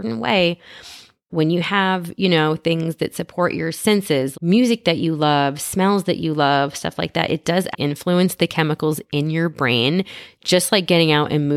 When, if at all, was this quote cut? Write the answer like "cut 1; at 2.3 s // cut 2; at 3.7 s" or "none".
cut 1; at 1.3 s // cut 2; at 4.3 s // cut 3; at 7.7 s